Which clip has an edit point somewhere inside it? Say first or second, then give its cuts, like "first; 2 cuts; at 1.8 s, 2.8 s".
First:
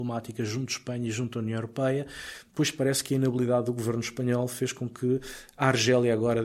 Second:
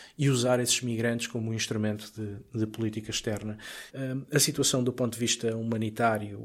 second; 1 cut; at 3.9 s